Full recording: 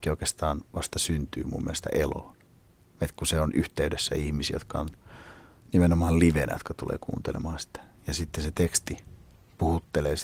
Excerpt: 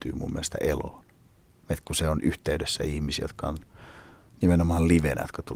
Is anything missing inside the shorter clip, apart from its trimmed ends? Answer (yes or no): no